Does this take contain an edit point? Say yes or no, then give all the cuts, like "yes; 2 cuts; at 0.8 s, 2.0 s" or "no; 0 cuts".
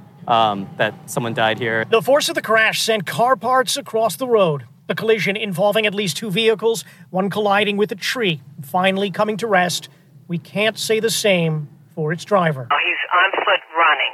no; 0 cuts